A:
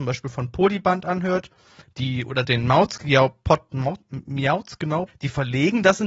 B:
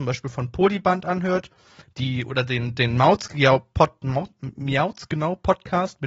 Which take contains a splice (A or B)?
A